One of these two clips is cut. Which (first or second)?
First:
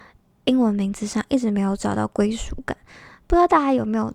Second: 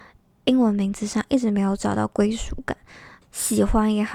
second